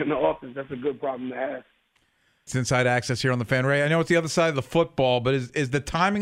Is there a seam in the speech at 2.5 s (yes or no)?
yes